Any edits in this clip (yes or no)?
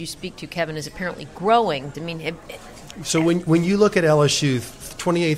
yes